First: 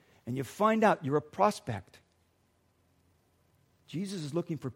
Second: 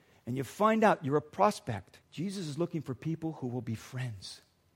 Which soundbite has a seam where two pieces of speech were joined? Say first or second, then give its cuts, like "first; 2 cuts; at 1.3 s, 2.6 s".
second; 1 cut; at 2.0 s